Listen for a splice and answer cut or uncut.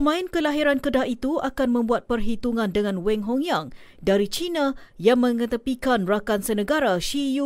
uncut